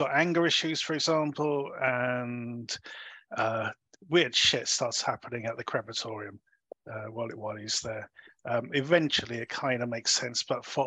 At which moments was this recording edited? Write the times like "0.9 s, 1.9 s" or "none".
none